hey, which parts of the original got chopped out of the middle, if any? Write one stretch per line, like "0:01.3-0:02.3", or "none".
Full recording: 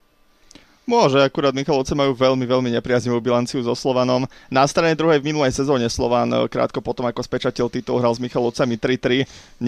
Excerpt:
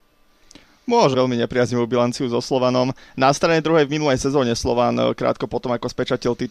0:01.1-0:02.5

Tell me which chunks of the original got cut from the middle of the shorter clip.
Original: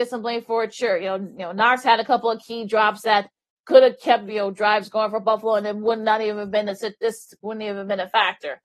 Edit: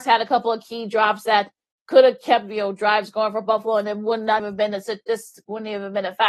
0:06.2-0:06.3

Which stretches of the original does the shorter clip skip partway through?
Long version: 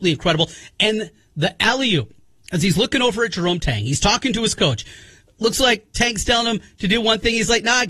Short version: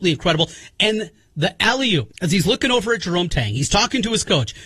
0:02.1-0:02.4

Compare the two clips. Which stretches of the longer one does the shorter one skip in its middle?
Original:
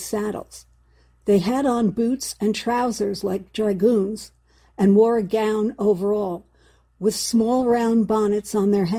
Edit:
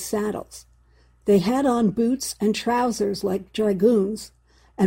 none

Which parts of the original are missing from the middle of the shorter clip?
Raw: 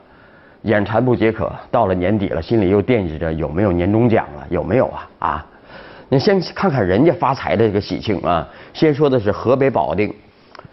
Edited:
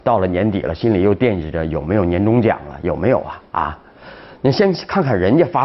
none

